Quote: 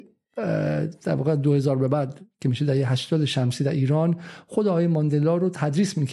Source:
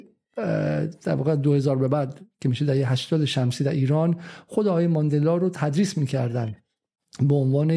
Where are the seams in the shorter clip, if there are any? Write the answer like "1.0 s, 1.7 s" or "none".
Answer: none